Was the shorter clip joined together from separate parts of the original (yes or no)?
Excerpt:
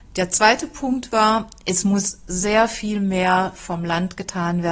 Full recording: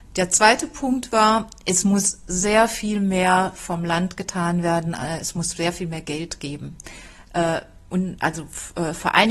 no